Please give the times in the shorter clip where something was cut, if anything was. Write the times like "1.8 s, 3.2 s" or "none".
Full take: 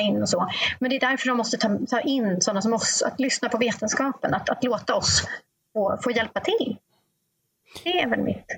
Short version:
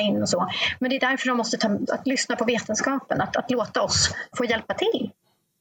1.9 s, 4.3 s